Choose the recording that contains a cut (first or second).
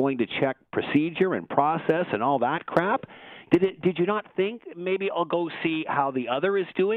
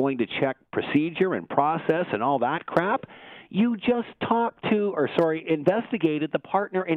first